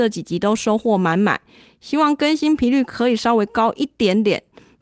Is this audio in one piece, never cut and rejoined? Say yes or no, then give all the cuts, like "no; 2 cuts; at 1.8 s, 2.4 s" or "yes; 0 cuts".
yes; 0 cuts